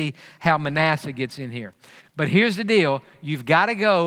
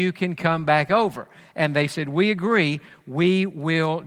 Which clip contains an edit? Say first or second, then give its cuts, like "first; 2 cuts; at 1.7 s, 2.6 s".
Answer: first; 1 cut; at 2.0 s